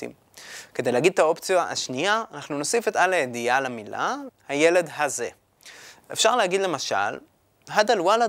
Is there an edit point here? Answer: yes; 1 cut; at 4.3 s

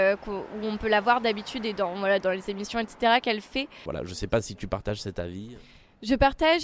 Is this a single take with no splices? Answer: no; 1 cut; at 3.9 s

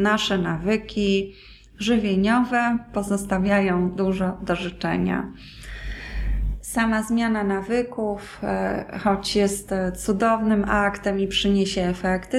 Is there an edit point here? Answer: no; 0 cuts

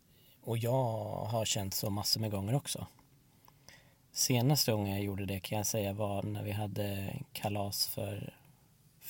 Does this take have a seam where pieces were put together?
no; 0 cuts

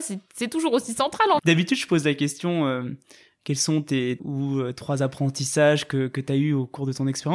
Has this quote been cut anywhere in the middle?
yes; 2 cuts; at 1.4 s, 4.2 s

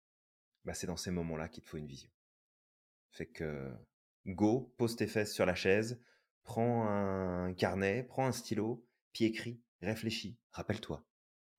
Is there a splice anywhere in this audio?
yes; 1 cut; at 10.4 s

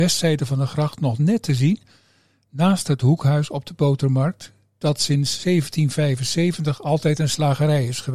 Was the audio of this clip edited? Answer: no; 0 cuts

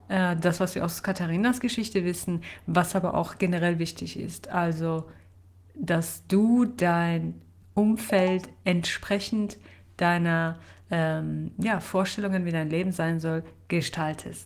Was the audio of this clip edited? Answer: no; 0 cuts

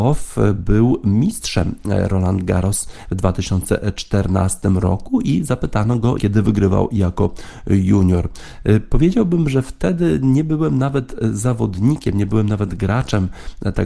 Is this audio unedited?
no; 1 cut; at 6.2 s

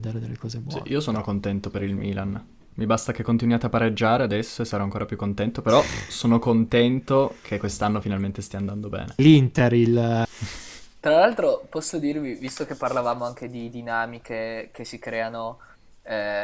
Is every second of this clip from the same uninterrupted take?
no; 2 cuts; at 9.2 s, 10.2 s

